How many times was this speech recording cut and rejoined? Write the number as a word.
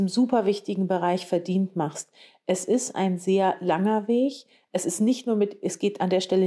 zero